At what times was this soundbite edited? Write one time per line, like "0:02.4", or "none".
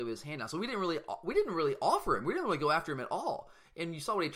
none